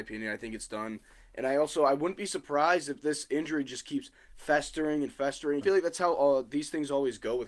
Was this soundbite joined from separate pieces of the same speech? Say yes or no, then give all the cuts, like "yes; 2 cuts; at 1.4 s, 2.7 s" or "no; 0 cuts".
yes; 1 cut; at 5.6 s